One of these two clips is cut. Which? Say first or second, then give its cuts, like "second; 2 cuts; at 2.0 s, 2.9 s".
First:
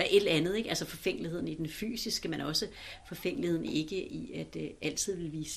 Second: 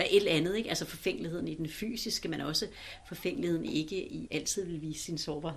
second; 1 cut; at 4.3 s